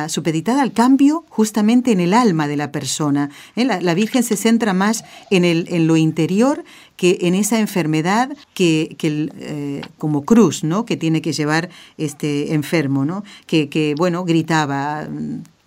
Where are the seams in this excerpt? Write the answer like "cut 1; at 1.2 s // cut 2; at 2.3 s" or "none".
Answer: cut 1; at 8.4 s